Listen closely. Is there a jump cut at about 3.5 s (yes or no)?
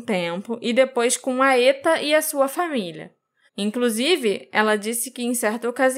yes